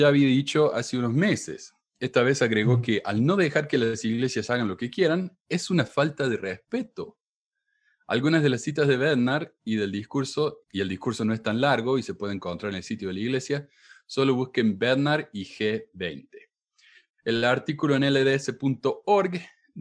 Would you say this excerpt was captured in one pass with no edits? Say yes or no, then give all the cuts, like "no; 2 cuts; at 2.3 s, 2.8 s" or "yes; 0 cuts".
no; 1 cut; at 10.6 s